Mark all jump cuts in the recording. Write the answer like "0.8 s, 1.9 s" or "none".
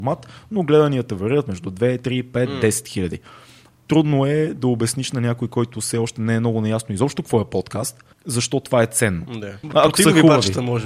8.1 s, 9.6 s